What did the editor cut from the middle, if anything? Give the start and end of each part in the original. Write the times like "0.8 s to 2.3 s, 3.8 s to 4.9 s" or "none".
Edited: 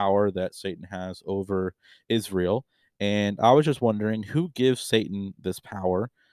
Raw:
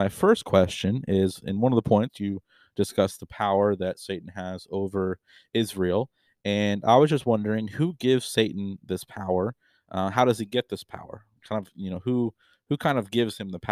none